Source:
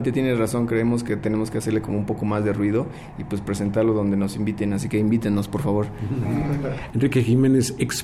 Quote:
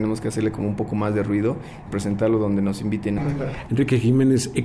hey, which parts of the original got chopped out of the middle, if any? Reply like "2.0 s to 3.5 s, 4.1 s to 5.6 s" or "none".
3.2 s to 3.4 s, 4.7 s to 6.4 s